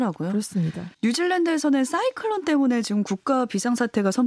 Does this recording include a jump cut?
yes; 1 cut; at 0.9 s

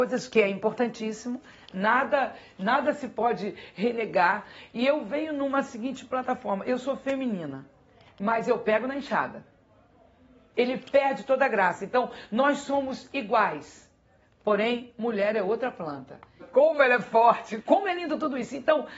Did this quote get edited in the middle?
yes; 3 cuts; at 10.5 s, 16.4 s, 17.6 s

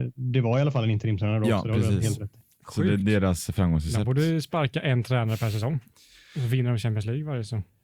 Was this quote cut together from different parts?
no; 0 cuts

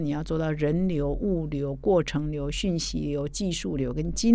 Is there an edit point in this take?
no; 0 cuts

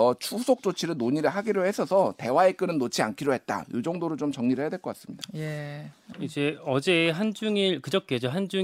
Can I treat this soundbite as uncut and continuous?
no; 1 cut; at 6.1 s

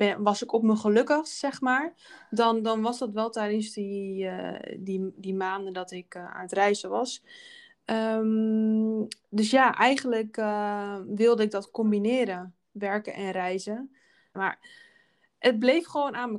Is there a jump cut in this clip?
yes; 1 cut; at 14.3 s

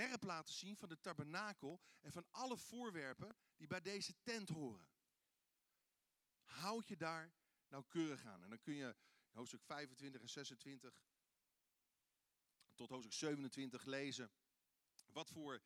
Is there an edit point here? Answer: no; 0 cuts

